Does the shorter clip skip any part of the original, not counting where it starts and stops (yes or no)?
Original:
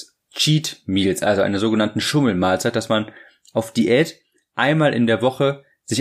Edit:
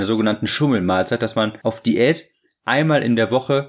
yes